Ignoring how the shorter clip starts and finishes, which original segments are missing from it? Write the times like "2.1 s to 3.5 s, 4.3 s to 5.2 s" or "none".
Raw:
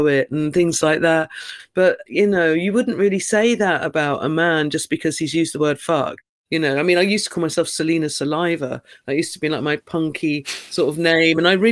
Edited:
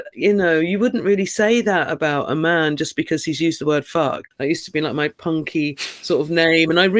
6.2 s to 9.0 s